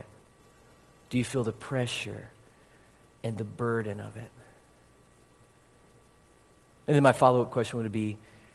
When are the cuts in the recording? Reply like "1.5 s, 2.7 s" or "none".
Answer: 6.7 s